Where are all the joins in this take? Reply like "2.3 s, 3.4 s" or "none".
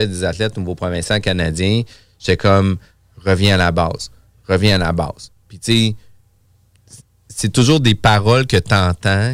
none